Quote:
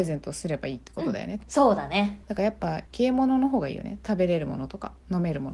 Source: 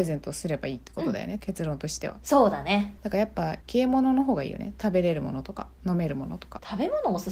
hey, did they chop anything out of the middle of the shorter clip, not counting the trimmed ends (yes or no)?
yes